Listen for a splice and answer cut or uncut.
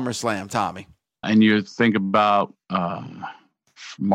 cut